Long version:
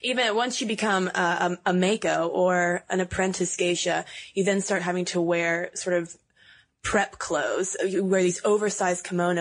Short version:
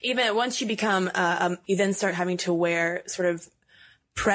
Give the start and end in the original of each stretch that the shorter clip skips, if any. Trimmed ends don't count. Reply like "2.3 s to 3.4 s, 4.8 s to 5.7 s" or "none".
1.6 s to 4.3 s